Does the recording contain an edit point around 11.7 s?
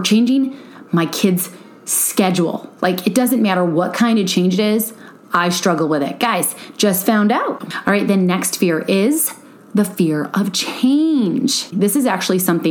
yes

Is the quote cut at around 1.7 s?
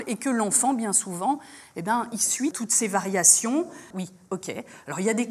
no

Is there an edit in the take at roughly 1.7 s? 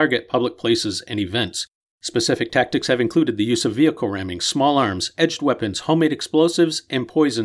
no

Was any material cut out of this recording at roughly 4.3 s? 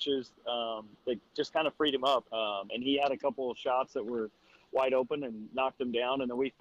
no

